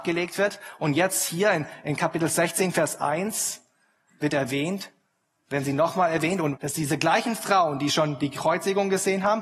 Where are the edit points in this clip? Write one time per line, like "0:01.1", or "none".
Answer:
0:06.6